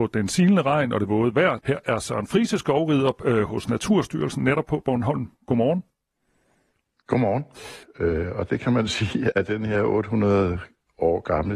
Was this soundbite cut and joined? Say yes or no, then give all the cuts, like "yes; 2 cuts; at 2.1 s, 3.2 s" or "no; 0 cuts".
yes; 3 cuts; at 1.6 s, 7.8 s, 9.3 s